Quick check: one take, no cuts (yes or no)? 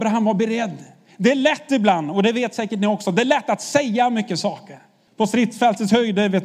no